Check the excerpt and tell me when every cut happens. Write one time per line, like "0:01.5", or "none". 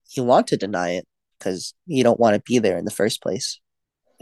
0:01.9